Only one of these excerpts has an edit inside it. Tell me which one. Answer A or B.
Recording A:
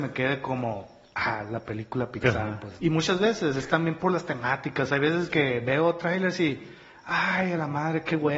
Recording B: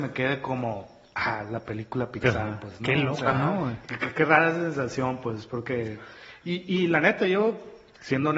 A